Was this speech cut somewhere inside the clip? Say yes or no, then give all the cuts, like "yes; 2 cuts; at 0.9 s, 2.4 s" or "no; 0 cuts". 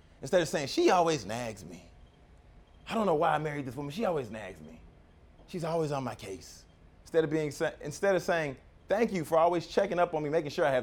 no; 0 cuts